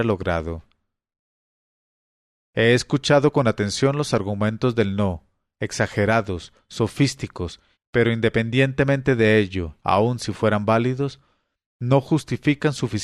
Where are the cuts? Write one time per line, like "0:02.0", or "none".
0:07.7
0:09.8